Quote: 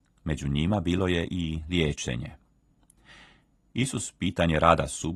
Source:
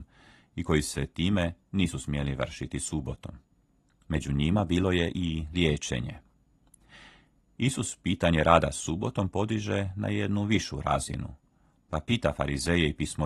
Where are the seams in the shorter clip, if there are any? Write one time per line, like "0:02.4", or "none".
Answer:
none